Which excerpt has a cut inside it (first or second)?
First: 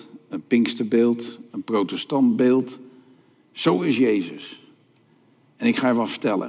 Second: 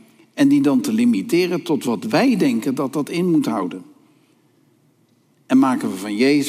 first